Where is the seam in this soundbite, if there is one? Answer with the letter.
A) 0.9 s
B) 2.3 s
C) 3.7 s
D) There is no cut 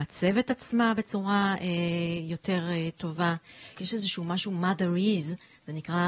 C